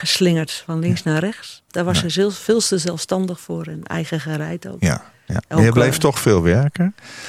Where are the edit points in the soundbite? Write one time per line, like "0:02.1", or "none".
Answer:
0:01.7
0:05.3